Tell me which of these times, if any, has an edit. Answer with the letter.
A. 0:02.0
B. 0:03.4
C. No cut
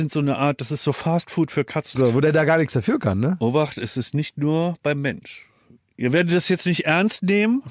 A